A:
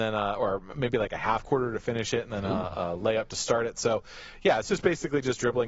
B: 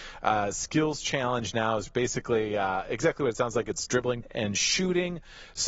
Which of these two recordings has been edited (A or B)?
B